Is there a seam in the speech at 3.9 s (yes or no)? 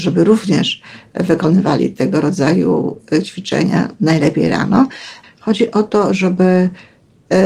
no